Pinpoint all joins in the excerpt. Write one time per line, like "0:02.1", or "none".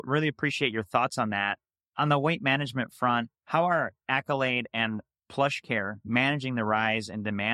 0:03.3